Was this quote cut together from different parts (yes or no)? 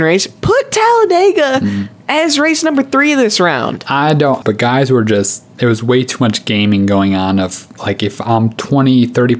yes